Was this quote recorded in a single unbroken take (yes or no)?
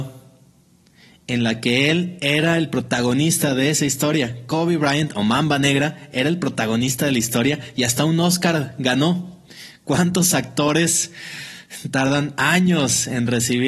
yes